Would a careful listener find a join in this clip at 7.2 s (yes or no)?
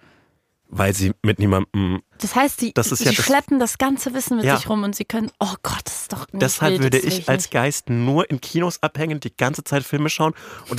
no